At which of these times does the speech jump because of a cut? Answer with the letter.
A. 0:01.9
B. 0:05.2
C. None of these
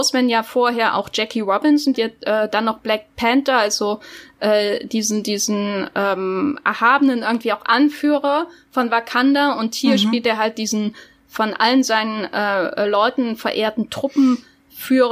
A